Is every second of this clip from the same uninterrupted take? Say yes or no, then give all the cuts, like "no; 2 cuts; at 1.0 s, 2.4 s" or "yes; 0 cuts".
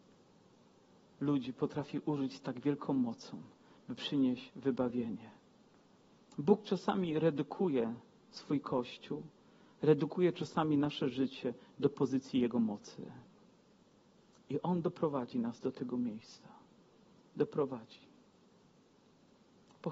yes; 0 cuts